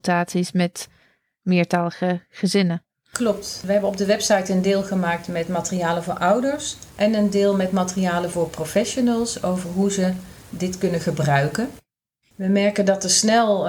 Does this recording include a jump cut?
yes; 2 cuts; at 6.9 s, 12.3 s

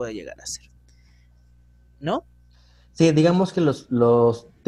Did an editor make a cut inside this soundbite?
no; 0 cuts

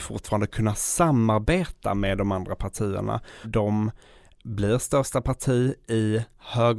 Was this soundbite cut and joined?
yes; 1 cut; at 3.4 s

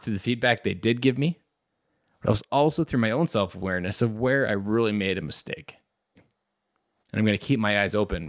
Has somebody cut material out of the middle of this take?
yes; 1 cut; at 6.2 s

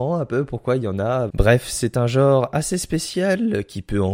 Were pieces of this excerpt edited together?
yes; 1 cut; at 1.3 s

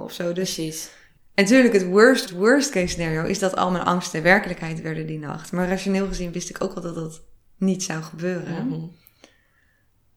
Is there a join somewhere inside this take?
yes; 1 cut; at 2.3 s

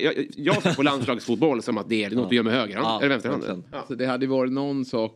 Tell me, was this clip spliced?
yes; 2 cuts; at 2.1 s, 3.7 s

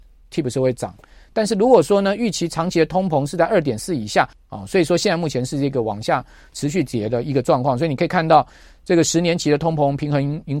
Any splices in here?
yes; 1 cut; at 4.3 s

